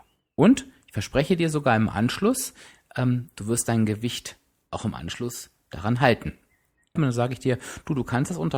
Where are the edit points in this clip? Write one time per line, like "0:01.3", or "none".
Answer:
0:07.0